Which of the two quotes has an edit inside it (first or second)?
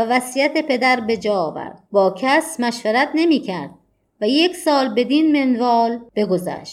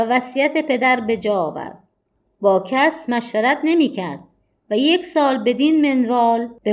first